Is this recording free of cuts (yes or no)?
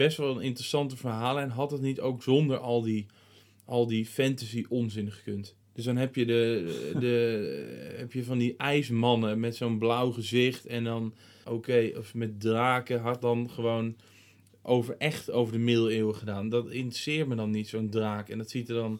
no